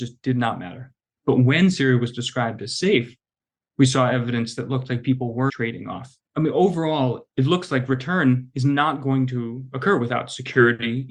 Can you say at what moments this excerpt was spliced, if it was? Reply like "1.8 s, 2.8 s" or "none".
5.5 s